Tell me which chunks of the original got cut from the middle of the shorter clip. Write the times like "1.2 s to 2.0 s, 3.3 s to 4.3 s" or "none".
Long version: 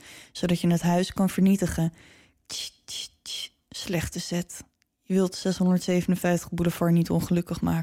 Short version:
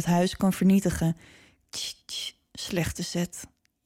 2.8 s to 3.2 s